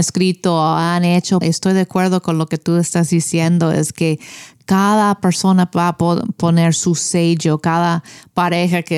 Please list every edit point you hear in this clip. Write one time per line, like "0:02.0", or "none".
0:01.4